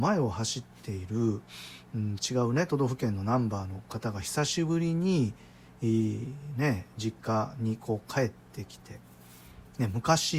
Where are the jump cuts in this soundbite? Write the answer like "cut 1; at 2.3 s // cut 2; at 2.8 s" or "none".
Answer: none